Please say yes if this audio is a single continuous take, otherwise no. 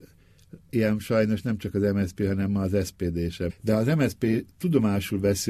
no